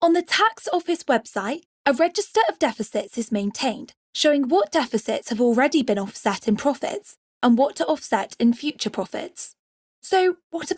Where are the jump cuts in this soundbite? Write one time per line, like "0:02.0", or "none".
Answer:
0:01.6